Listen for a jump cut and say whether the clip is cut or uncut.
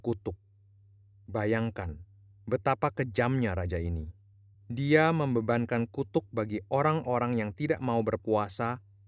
uncut